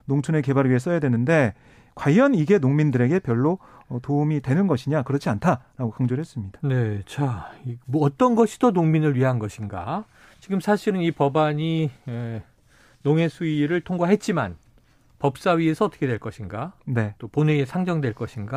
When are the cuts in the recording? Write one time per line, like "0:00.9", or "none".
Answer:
none